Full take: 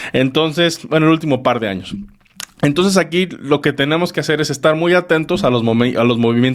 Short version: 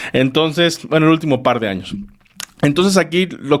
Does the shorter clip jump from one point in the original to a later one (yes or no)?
no